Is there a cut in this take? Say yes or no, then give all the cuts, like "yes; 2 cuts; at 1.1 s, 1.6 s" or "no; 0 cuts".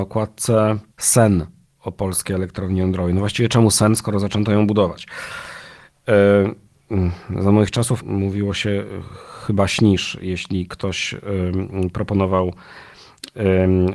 yes; 2 cuts; at 0.9 s, 8.0 s